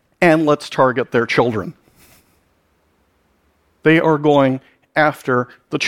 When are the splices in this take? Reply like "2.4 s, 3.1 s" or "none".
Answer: none